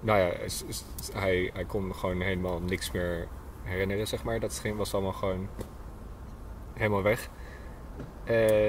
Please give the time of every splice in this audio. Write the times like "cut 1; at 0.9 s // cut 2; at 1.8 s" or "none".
none